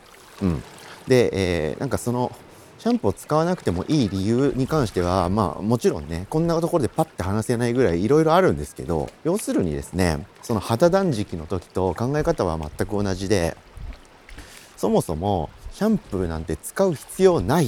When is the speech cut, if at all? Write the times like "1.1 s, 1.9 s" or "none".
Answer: 9.2 s